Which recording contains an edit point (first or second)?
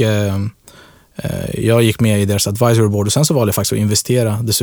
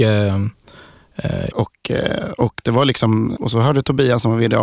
second